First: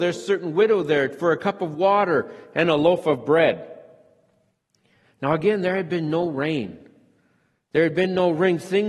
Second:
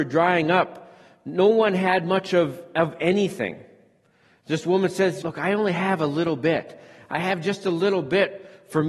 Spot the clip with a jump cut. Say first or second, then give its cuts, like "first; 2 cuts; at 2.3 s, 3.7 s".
second; 1 cut; at 5.2 s